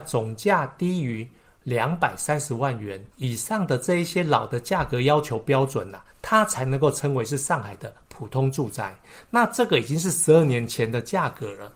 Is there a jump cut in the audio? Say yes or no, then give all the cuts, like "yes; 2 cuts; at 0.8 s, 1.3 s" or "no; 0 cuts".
yes; 1 cut; at 3.1 s